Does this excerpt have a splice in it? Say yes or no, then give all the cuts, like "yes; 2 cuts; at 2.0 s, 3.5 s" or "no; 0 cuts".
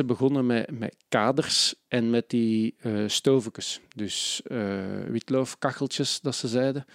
no; 0 cuts